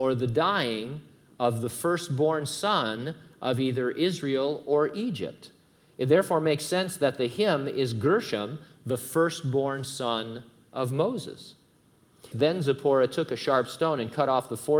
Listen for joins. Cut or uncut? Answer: cut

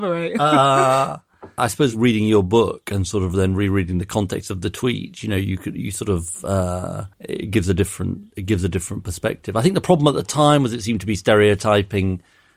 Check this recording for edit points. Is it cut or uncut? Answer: cut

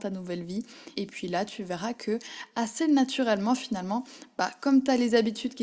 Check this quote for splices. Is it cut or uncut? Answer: cut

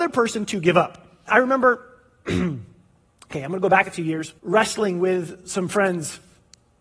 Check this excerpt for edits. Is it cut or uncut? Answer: cut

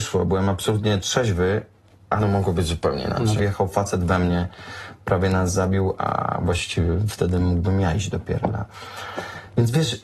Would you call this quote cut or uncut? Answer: cut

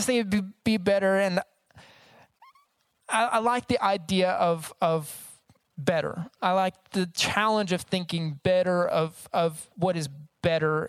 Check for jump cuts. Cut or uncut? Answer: uncut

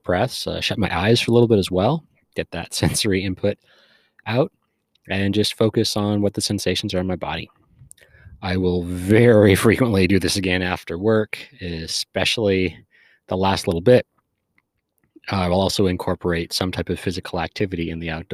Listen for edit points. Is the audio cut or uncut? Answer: uncut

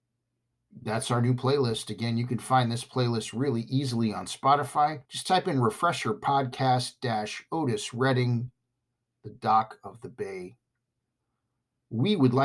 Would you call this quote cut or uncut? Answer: cut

